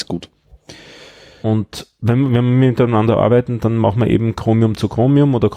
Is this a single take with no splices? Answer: no; 1 cut; at 2.3 s

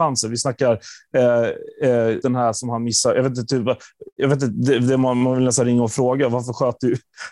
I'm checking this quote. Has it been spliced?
yes; 1 cut; at 2.2 s

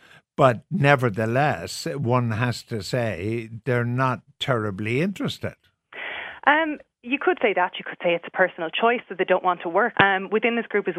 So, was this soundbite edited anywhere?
yes; 1 cut; at 9.9 s

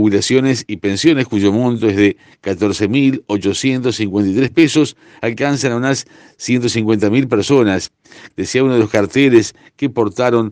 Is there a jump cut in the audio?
yes; 1 cut; at 8.3 s

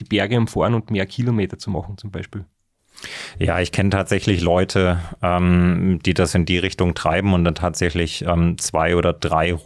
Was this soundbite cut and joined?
no; 0 cuts

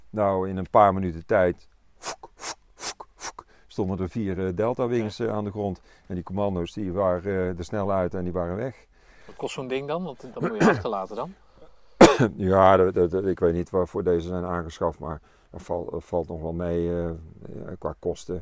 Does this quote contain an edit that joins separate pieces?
no; 0 cuts

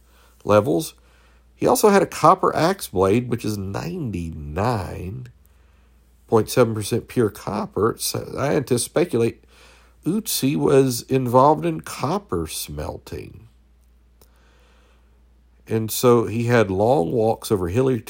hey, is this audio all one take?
yes; 0 cuts

